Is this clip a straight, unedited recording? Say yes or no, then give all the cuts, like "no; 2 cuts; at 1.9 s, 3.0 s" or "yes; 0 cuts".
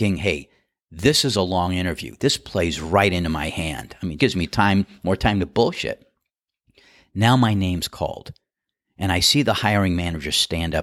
no; 1 cut; at 4.2 s